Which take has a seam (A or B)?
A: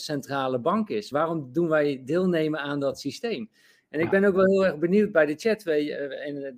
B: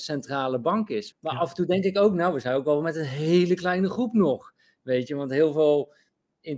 B